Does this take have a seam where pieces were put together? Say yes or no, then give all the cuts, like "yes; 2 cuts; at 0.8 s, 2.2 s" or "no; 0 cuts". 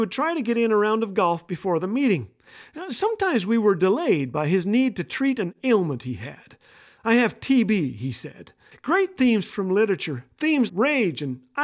yes; 2 cuts; at 8.7 s, 10.7 s